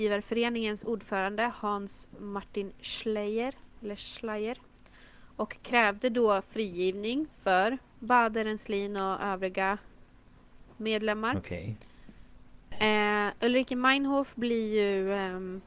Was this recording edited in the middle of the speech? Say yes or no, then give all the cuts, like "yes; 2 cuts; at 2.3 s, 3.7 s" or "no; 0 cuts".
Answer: yes; 1 cut; at 12.7 s